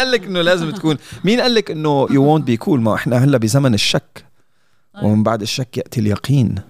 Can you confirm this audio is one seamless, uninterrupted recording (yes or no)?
no